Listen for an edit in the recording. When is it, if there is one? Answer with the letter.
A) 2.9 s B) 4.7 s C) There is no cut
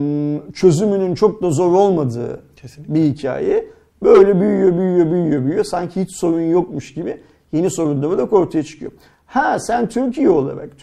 C